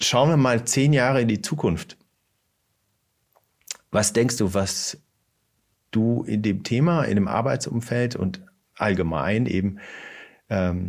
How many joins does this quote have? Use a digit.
0